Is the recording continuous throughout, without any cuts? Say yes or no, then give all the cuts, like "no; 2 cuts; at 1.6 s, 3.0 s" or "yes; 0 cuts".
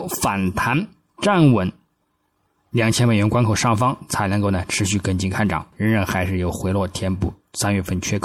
no; 1 cut; at 5.7 s